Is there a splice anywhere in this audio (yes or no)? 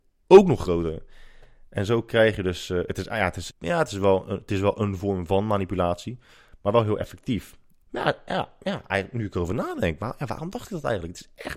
yes